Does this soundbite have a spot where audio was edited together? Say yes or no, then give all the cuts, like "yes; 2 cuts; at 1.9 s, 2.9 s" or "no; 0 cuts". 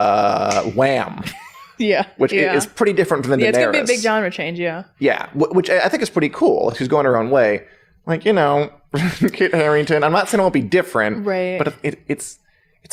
no; 0 cuts